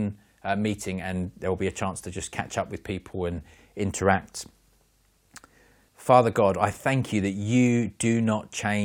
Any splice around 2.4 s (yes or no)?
no